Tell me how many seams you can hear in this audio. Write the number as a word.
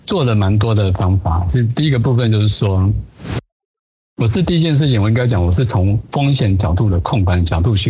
zero